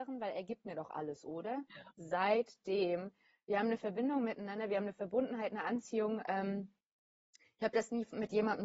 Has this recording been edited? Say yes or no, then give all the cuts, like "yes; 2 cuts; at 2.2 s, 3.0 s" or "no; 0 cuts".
yes; 1 cut; at 1.9 s